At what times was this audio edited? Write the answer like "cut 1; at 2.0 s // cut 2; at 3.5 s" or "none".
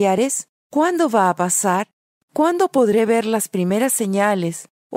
none